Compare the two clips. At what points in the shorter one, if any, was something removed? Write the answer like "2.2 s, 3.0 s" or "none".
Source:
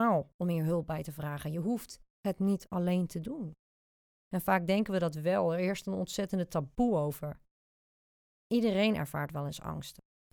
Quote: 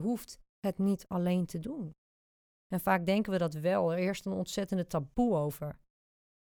none